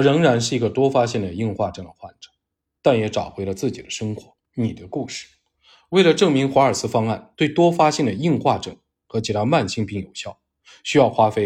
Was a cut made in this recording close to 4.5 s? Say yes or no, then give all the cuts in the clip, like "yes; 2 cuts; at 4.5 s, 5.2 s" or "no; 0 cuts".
yes; 1 cut; at 4.5 s